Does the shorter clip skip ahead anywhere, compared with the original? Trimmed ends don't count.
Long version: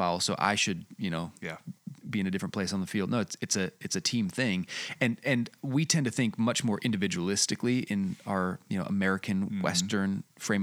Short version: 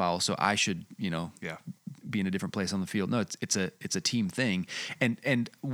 no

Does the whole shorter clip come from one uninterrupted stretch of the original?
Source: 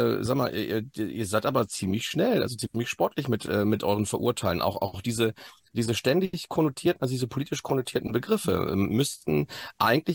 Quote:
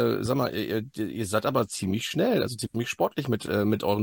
yes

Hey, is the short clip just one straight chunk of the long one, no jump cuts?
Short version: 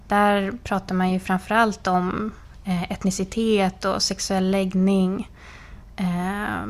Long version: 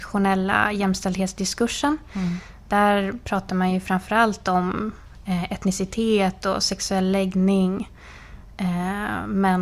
yes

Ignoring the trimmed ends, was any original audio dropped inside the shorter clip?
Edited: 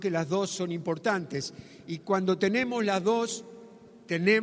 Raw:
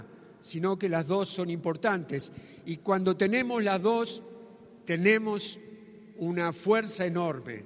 no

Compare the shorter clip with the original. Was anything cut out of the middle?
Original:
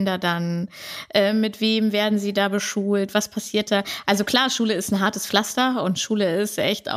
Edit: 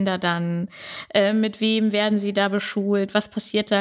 no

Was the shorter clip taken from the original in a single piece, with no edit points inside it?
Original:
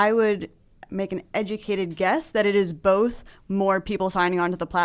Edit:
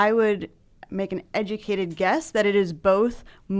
yes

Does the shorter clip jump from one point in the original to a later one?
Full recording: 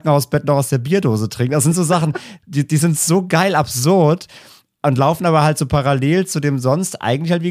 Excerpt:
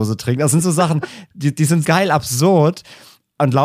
yes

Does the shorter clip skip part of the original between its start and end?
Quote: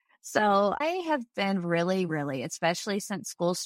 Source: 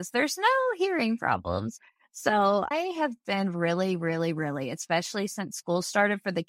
yes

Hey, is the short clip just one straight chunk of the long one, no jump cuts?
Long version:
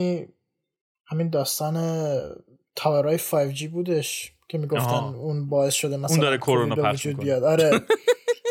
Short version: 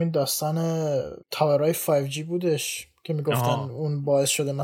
no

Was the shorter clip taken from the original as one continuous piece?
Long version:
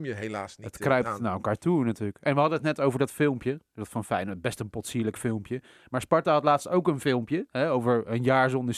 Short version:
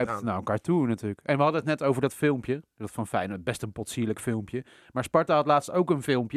yes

